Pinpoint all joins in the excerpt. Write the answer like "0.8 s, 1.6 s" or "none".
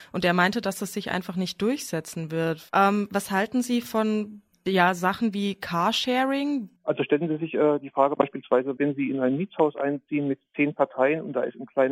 2.7 s, 6.8 s, 8.8 s